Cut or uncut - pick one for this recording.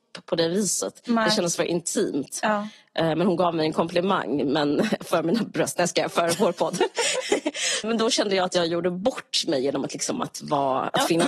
cut